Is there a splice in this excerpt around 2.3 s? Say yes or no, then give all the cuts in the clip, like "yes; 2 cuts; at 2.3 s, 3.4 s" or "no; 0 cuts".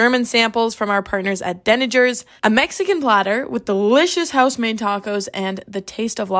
no; 0 cuts